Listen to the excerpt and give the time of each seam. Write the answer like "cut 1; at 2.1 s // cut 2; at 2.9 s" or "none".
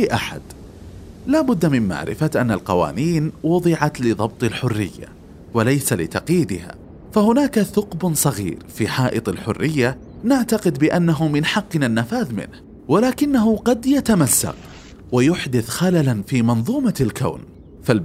cut 1; at 12.8 s